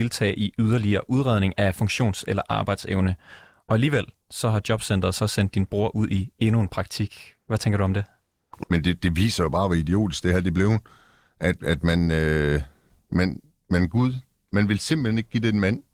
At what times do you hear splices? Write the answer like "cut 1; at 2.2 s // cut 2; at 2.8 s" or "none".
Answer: cut 1; at 8.6 s